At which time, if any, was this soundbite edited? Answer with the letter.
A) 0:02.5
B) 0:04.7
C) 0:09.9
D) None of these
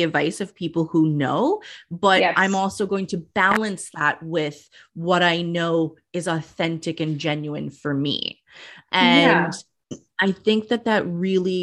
C